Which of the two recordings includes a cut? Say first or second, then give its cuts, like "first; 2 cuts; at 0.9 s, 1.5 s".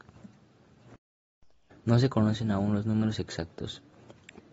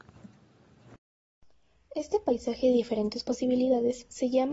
first; 1 cut; at 1.7 s